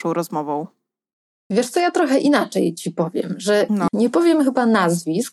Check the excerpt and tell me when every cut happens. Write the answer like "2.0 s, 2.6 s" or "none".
3.9 s